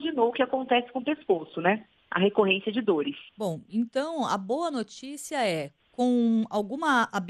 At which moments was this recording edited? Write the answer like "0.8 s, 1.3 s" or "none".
3.3 s